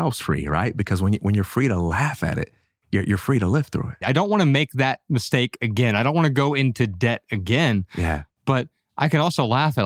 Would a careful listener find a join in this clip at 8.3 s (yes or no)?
no